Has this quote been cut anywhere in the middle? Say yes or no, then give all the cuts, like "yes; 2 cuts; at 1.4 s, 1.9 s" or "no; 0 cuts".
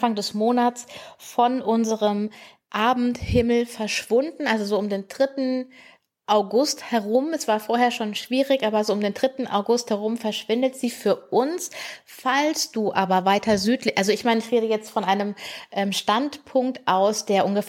no; 0 cuts